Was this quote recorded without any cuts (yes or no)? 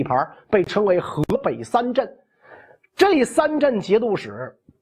yes